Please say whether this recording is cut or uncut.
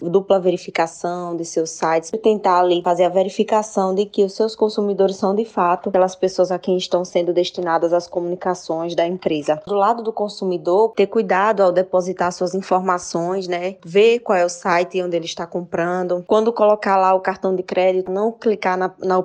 uncut